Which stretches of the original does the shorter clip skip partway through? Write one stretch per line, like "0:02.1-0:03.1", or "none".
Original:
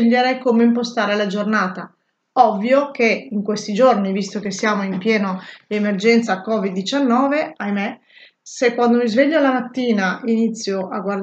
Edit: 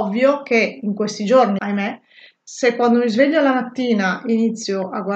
0:04.1-0:07.6